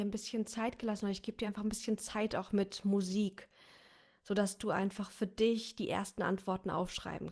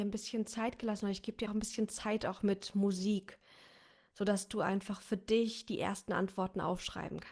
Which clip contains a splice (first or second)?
second